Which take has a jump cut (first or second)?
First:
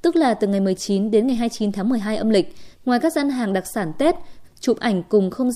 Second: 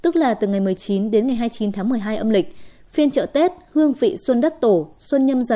first